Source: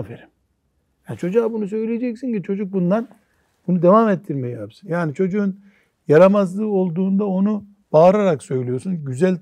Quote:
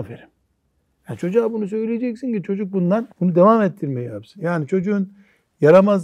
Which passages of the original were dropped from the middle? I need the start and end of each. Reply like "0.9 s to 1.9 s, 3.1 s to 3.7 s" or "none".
3.1 s to 3.6 s